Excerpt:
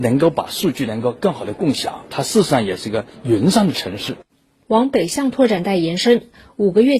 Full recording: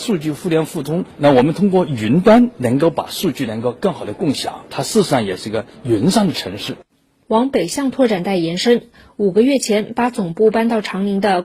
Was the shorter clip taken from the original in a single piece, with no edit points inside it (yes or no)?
yes